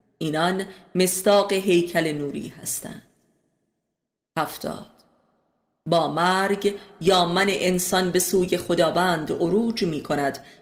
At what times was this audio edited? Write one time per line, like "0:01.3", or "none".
none